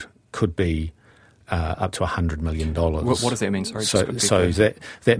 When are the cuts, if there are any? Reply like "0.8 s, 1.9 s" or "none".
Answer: none